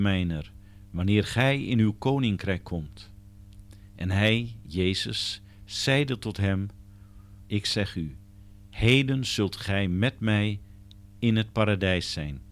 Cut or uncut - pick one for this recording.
cut